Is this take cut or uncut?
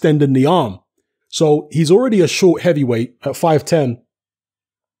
cut